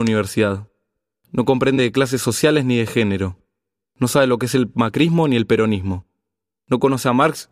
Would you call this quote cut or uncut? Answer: uncut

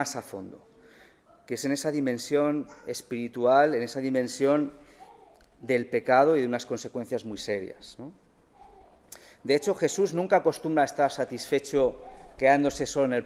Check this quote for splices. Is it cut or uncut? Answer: uncut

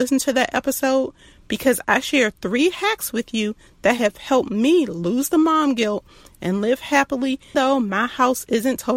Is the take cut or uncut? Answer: cut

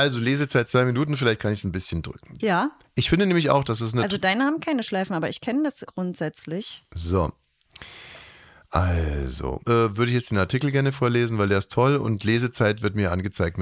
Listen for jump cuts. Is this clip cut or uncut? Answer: cut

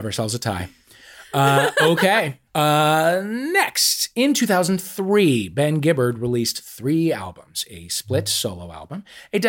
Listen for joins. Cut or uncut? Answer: cut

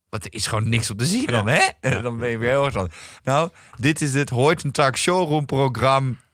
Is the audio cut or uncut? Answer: cut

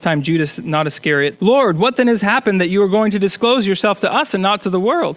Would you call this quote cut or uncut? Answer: cut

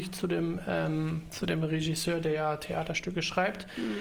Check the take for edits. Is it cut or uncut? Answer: uncut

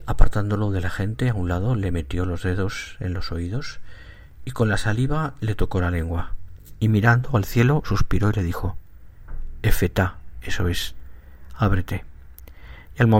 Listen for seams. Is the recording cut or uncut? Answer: uncut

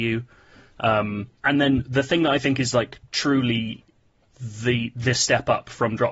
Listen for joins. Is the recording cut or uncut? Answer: cut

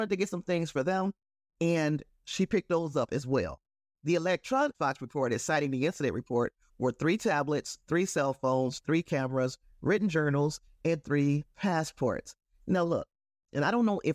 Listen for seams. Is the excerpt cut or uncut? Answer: uncut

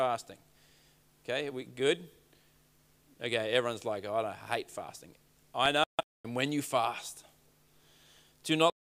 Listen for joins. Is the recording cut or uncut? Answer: cut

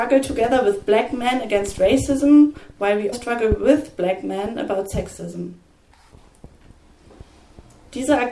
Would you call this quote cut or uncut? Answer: cut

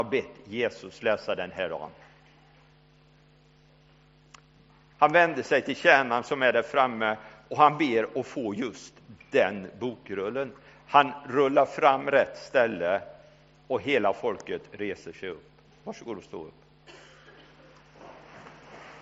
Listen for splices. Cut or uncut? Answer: cut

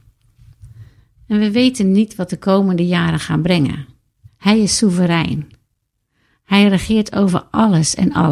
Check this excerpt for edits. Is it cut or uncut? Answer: cut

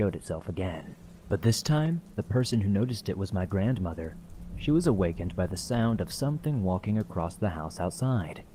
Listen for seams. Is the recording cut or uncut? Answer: uncut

